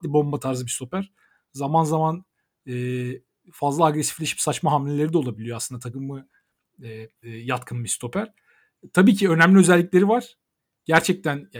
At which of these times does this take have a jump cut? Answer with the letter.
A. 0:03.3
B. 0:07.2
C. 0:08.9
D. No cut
B